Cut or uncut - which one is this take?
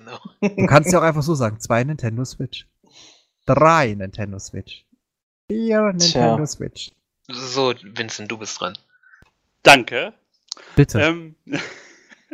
uncut